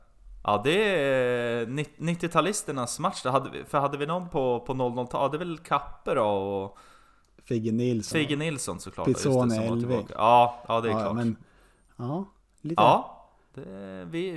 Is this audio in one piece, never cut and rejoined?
yes; 0 cuts

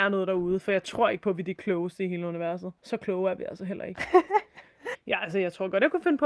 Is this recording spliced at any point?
yes; 2 cuts; at 2.8 s, 4.9 s

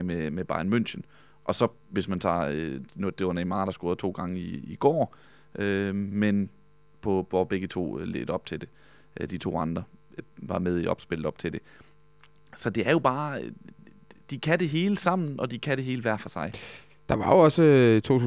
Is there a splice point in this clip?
no; 0 cuts

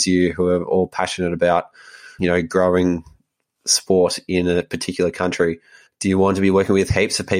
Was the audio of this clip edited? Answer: yes; 2 cuts; at 2.2 s, 5.9 s

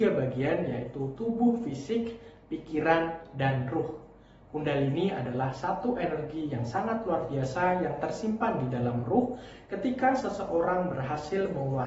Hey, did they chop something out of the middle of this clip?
no; 0 cuts

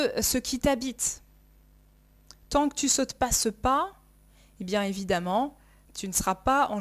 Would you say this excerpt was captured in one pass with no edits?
no; 1 cut; at 5.9 s

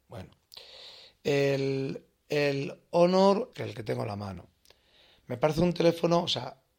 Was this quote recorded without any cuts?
no; 1 cut; at 3.5 s

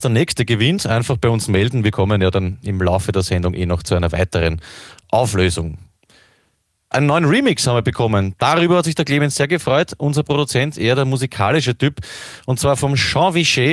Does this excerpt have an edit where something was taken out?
no; 0 cuts

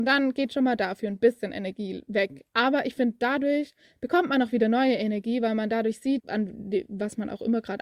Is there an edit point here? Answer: yes; 1 cut; at 6.2 s

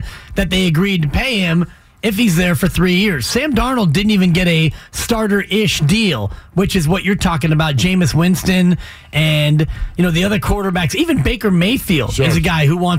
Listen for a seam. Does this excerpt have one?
no; 0 cuts

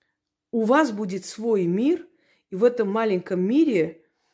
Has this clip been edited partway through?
no; 0 cuts

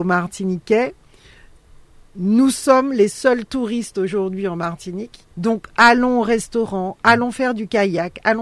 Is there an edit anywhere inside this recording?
yes; 1 cut; at 5.3 s

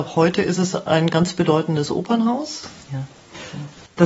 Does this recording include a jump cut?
yes; 1 cut; at 2.9 s

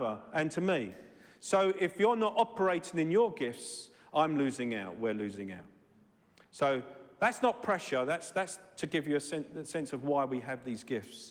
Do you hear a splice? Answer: no; 0 cuts

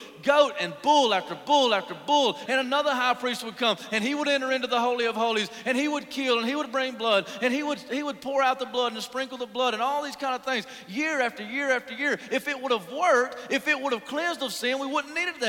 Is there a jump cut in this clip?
yes; 1 cut; at 2.5 s

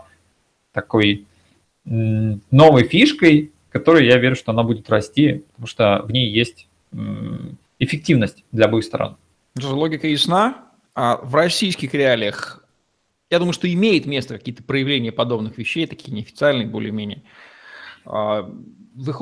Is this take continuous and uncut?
no; 1 cut; at 7.7 s

